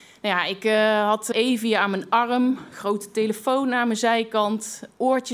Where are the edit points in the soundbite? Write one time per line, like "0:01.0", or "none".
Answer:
0:01.3